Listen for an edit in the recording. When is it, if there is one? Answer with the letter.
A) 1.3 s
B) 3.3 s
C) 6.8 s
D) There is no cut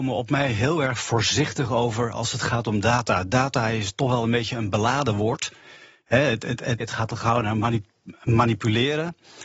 C